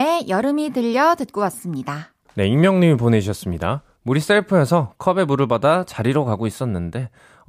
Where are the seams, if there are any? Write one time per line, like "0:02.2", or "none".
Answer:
0:02.3
0:04.0